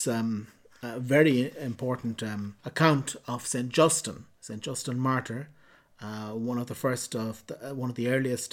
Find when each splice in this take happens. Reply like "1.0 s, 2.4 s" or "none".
2.6 s